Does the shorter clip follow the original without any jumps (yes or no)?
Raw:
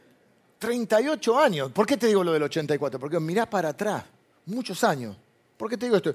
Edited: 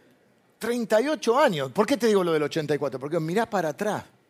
yes